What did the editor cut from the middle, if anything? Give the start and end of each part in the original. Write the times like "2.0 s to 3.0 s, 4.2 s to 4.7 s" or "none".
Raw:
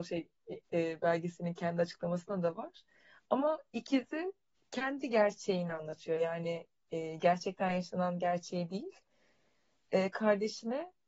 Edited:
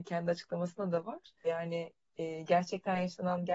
3.0 s to 6.2 s

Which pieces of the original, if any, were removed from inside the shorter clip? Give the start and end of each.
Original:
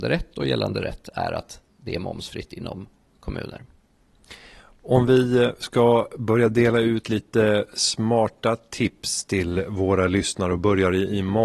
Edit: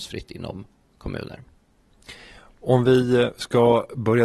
none

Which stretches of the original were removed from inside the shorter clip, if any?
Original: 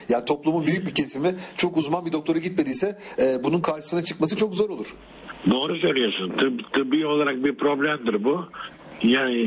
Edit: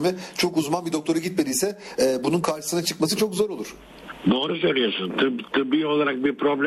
none

